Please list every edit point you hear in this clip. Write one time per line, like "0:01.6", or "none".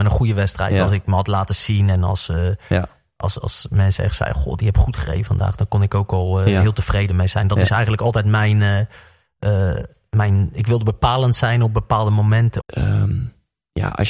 0:03.4
0:12.6